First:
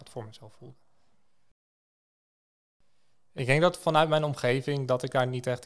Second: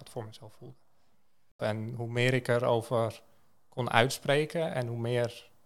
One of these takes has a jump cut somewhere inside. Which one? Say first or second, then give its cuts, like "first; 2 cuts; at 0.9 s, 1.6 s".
second; 1 cut; at 1.6 s